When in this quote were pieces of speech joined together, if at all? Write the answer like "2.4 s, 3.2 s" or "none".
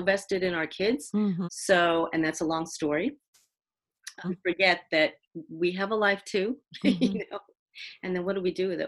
1.4 s, 4.2 s